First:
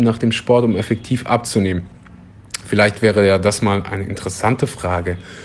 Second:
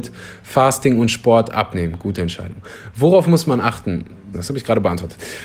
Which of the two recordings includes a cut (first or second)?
second